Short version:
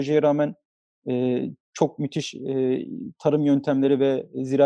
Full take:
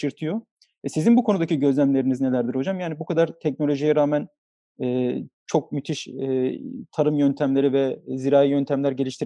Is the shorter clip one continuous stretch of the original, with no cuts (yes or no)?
yes